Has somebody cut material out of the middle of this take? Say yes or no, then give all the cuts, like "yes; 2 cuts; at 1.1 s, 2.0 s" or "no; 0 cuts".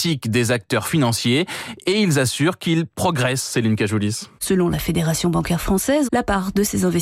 yes; 2 cuts; at 4.4 s, 6.0 s